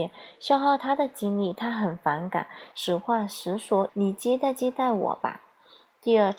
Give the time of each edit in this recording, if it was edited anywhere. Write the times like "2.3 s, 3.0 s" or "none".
2.7 s, 3.9 s